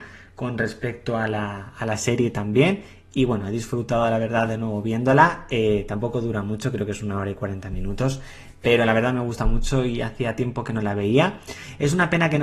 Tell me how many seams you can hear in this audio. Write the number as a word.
zero